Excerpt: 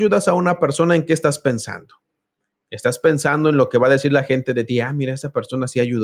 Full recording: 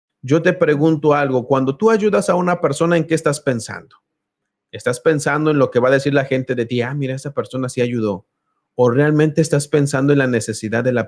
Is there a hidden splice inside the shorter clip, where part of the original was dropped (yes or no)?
no